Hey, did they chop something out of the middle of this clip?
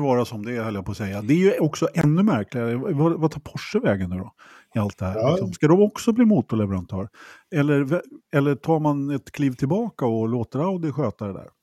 no; 0 cuts

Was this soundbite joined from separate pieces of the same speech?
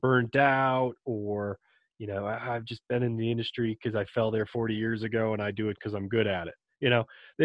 no; 0 cuts

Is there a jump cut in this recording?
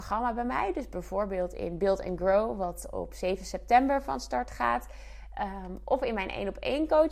no; 0 cuts

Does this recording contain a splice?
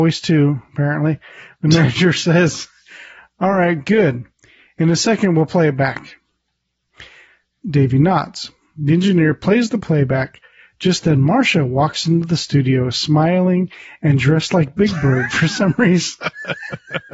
no; 0 cuts

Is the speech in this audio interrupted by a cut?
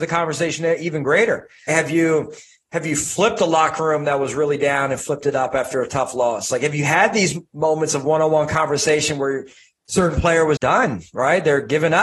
yes; 2 cuts; at 1.7 s, 10.6 s

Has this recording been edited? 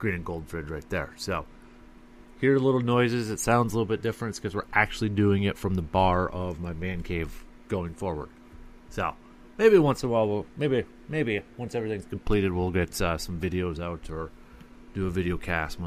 yes; 1 cut; at 11.5 s

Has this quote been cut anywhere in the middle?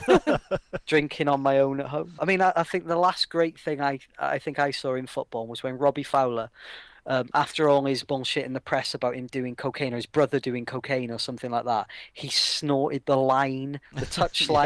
yes; 1 cut; at 2.2 s

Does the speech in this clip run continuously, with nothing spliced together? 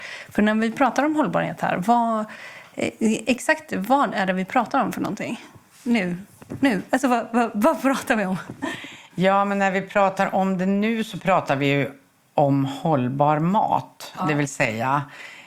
yes; 0 cuts

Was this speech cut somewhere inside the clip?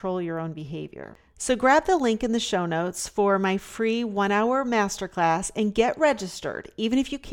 no; 0 cuts

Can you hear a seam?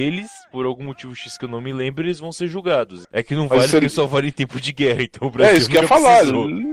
yes; 1 cut; at 3.0 s

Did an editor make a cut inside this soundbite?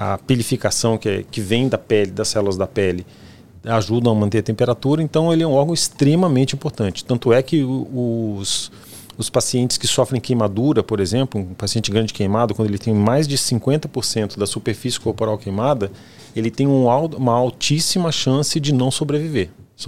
no; 0 cuts

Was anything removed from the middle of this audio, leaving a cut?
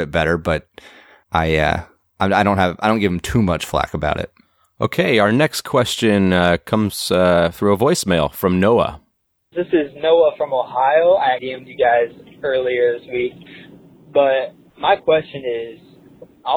yes; 2 cuts; at 9.5 s, 11.4 s

